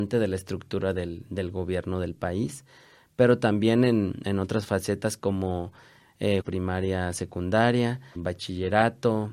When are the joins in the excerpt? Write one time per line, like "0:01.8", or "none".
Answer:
0:06.4
0:08.2